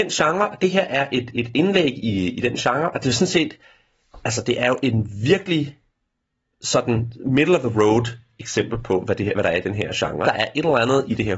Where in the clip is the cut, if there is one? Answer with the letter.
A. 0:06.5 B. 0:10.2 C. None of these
B